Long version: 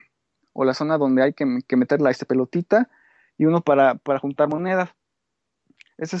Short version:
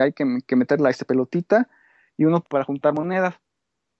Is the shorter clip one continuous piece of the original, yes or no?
no